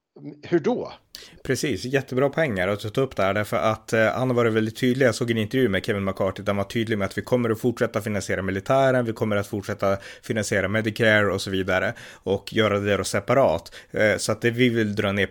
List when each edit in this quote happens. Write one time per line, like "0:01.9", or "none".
none